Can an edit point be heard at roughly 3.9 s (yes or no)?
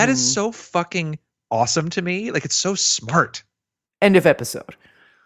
yes